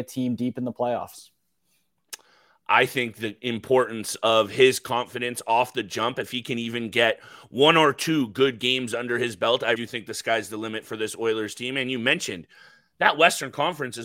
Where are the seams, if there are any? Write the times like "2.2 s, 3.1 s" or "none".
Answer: 9.7 s